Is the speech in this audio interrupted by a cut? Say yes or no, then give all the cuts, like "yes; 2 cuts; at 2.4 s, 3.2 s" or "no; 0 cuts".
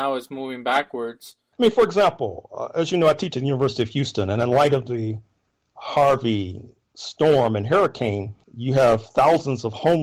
yes; 2 cuts; at 1.5 s, 8.4 s